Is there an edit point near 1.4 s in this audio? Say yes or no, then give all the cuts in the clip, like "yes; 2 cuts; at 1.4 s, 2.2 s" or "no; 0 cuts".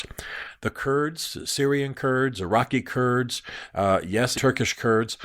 no; 1 cut; at 4.4 s